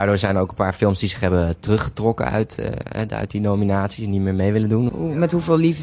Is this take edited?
yes; 1 cut; at 4.9 s

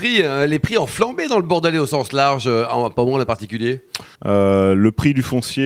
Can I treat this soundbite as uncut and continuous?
no; 1 cut; at 4.1 s

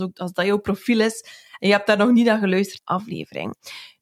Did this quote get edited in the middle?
yes; 1 cut; at 2.8 s

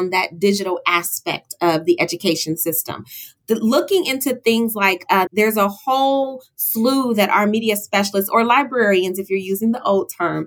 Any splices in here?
yes; 1 cut; at 5.3 s

